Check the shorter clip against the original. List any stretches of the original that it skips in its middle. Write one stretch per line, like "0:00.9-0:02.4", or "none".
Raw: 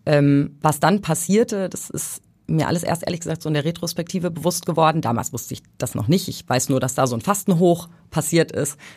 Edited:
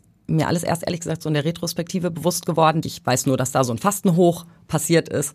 0:05.0-0:06.3